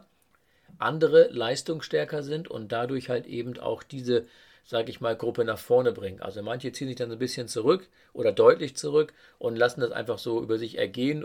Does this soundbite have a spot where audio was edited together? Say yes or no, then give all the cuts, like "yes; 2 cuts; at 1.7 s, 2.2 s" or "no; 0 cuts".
no; 0 cuts